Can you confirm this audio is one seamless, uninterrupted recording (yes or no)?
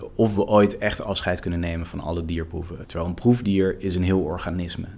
no